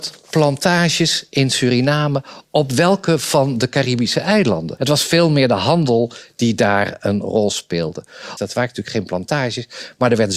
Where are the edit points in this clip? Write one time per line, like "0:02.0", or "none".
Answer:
0:04.8
0:08.4